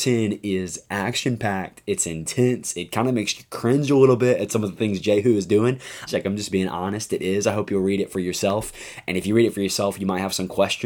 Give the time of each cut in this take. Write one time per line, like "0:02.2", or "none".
0:06.1